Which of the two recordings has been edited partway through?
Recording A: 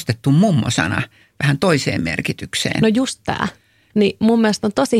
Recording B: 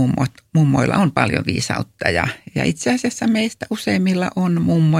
A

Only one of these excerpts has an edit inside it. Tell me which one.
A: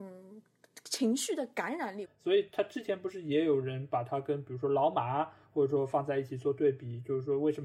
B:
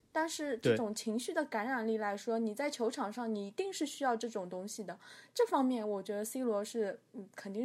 A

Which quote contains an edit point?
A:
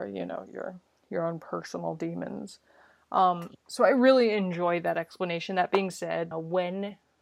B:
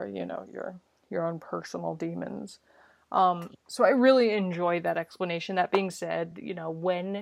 A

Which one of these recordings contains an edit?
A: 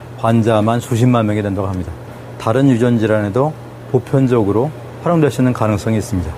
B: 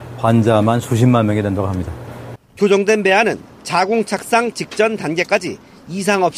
B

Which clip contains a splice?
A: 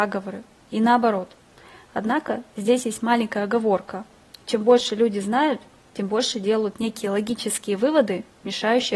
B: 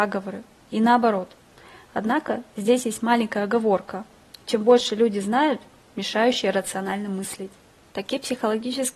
B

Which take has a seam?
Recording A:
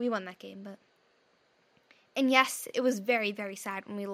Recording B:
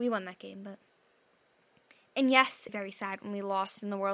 B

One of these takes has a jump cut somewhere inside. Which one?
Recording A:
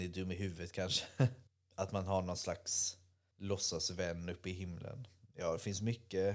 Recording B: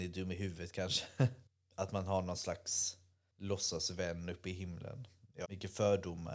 B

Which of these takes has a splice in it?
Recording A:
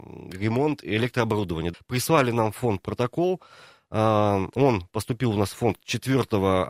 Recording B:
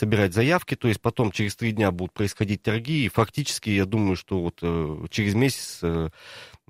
A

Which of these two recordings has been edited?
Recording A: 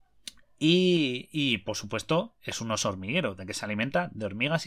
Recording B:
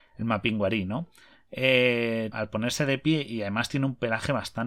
B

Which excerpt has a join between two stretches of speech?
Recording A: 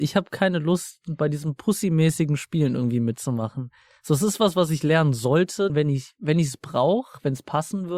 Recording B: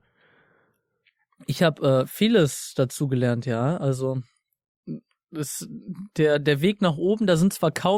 A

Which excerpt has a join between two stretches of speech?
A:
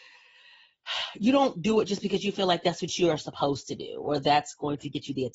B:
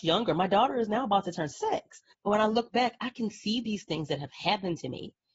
B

